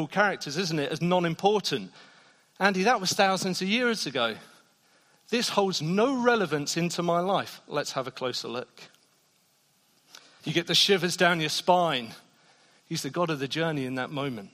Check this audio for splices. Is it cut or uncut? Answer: cut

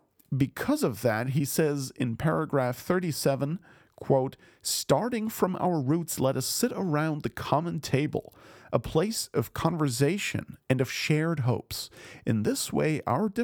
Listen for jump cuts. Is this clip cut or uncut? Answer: uncut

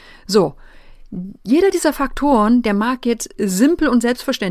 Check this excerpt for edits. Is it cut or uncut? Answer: cut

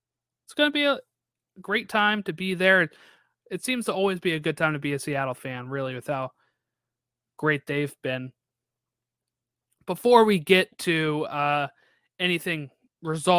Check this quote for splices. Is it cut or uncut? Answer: uncut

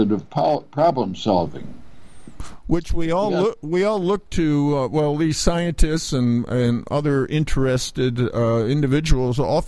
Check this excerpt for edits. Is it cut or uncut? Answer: uncut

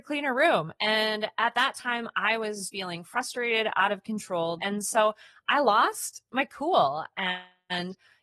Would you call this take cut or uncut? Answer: cut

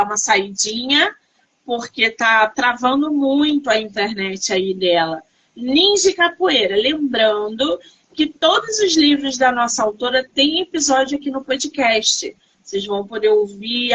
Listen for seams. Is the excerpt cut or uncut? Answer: cut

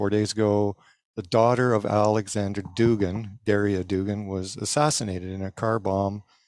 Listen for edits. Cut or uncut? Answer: uncut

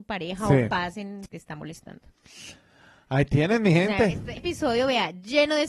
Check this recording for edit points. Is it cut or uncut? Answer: cut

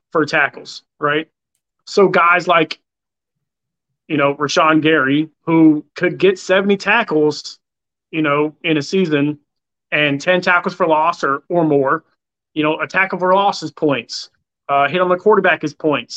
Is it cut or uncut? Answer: uncut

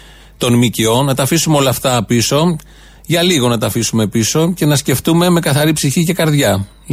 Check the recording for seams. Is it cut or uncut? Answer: uncut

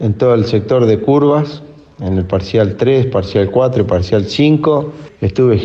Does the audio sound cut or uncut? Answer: uncut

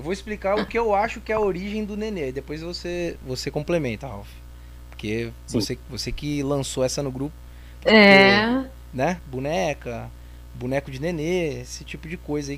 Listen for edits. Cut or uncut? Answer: cut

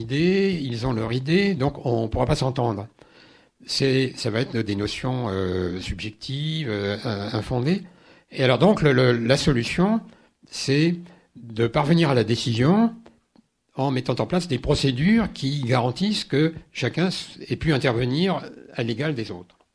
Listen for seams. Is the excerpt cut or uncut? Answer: uncut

